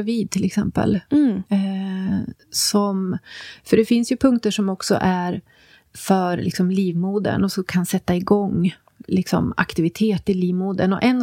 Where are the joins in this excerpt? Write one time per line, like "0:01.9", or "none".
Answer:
0:01.5